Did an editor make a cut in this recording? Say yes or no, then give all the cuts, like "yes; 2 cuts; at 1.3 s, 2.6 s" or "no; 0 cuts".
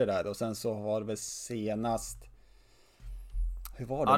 no; 0 cuts